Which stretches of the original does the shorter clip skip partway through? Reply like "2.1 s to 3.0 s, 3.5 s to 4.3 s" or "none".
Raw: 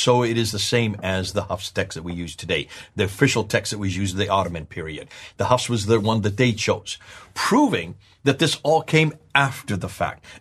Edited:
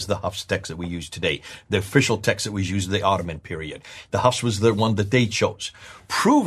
none